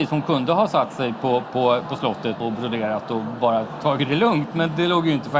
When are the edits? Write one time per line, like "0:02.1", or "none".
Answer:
0:02.4